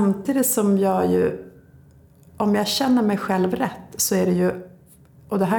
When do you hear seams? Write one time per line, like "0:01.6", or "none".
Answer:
none